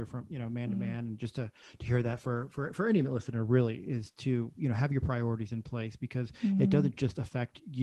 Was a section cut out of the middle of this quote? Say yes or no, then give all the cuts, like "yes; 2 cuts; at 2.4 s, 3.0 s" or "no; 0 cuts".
no; 0 cuts